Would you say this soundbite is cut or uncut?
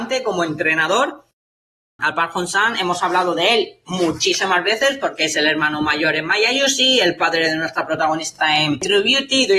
cut